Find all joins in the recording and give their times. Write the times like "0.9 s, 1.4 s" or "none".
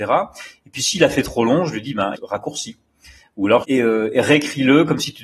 2.1 s, 3.6 s